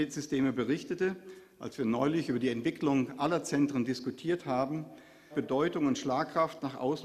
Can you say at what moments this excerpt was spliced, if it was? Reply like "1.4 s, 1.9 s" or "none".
5.3 s